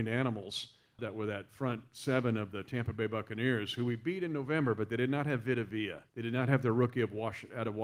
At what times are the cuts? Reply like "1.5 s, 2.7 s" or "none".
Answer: 1.0 s, 6.1 s